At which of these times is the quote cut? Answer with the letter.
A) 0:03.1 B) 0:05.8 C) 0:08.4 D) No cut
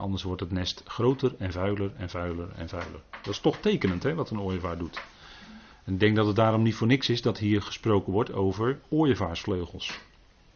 D